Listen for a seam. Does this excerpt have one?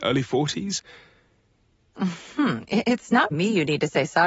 yes; 2 cuts; at 1.9 s, 3.3 s

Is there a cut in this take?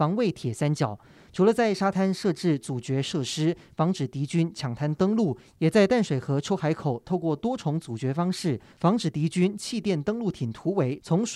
no; 0 cuts

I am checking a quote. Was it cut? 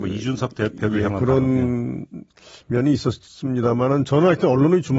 no; 0 cuts

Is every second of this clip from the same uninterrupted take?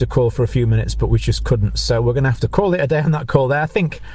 yes; 0 cuts

